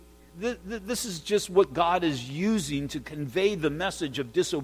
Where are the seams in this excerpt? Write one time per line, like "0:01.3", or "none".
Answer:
none